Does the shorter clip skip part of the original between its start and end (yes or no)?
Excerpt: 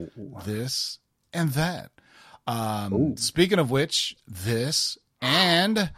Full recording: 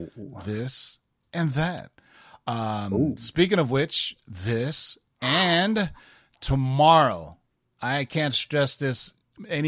no